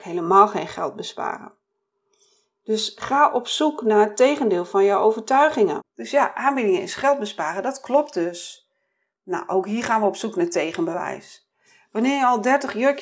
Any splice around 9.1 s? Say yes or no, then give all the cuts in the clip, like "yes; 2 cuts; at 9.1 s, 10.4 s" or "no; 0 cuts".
no; 1 cut; at 5.8 s